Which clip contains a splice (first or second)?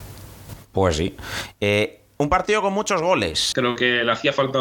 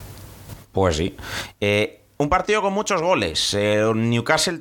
first